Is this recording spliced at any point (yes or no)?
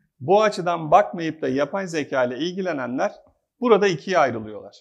no